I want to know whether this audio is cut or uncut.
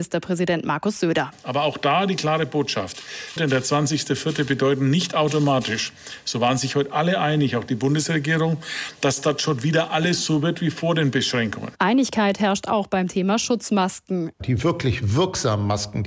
cut